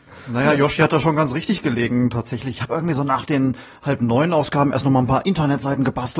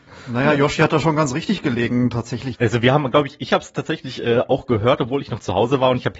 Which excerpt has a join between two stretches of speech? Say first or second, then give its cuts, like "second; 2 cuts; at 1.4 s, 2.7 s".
second; 1 cut; at 2.5 s